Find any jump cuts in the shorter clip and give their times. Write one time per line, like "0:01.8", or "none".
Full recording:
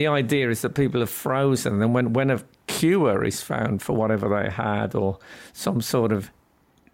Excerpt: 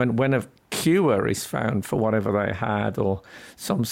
none